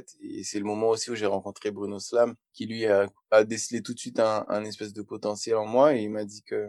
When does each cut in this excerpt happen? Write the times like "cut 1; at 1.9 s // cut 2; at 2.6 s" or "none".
none